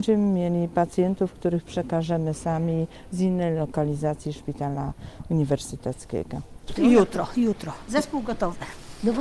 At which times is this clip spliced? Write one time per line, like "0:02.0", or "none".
0:06.8
0:07.8